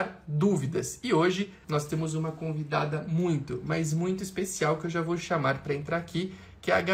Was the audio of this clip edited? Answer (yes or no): yes